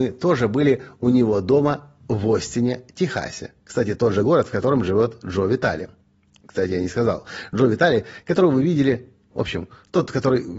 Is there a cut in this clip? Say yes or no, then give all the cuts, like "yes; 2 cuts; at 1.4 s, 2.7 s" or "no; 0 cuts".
yes; 1 cut; at 9.3 s